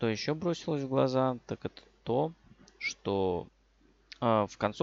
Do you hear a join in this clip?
no; 0 cuts

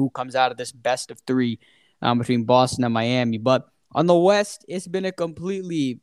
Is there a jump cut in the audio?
no; 0 cuts

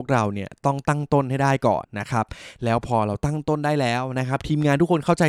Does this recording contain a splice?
yes; 1 cut; at 1.8 s

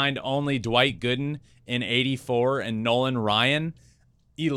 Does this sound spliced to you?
no; 0 cuts

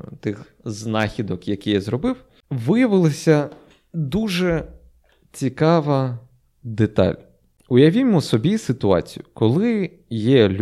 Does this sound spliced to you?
no; 0 cuts

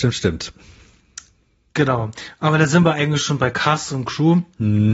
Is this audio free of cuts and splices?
yes; 0 cuts

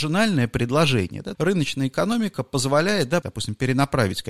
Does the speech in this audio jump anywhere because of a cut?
yes; 2 cuts; at 1.3 s, 3.2 s

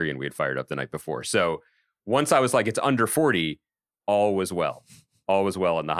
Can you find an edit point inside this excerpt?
no; 0 cuts

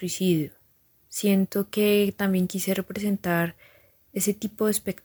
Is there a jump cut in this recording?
yes; 1 cut; at 1.0 s

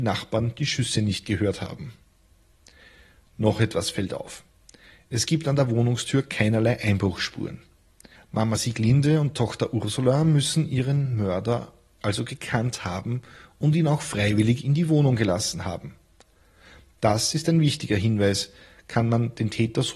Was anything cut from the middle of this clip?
yes; 1 cut; at 8.2 s

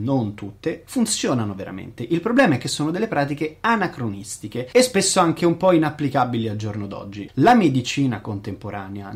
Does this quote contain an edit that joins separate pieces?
yes; 1 cut; at 7.3 s

